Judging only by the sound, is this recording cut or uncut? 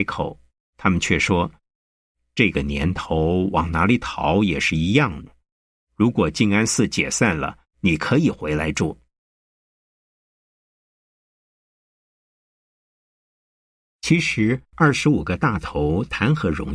uncut